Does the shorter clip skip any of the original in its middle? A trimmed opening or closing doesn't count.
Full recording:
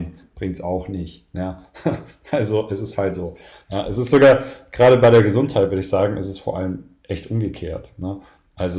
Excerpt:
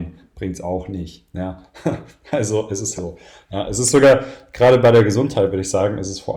yes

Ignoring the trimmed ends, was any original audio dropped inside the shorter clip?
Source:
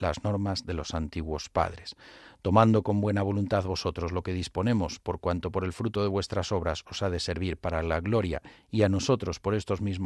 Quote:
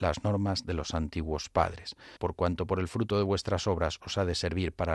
yes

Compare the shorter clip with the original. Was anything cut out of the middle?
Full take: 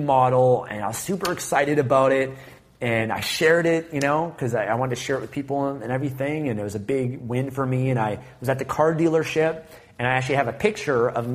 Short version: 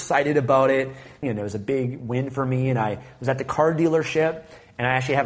yes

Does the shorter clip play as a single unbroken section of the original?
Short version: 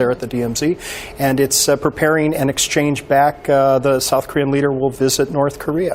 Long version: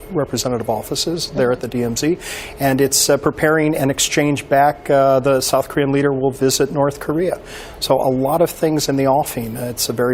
yes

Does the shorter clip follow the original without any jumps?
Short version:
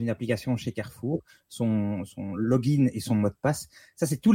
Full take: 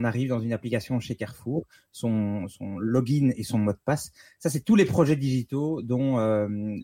yes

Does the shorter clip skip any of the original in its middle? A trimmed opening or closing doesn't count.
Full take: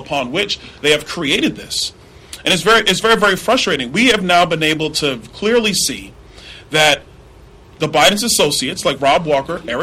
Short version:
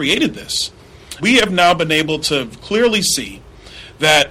yes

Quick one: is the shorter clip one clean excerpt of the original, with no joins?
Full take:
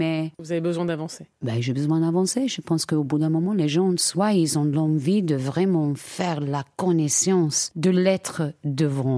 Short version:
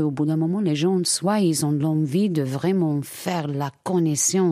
yes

